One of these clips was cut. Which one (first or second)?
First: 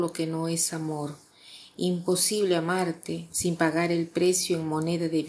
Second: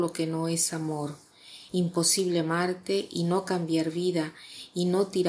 second